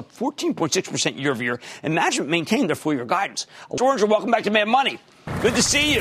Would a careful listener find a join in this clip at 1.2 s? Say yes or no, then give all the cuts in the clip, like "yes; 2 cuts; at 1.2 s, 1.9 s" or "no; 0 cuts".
no; 1 cut; at 3.8 s